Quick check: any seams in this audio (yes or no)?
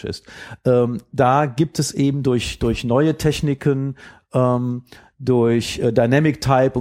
no